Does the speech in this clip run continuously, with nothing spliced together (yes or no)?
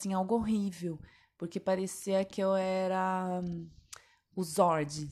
yes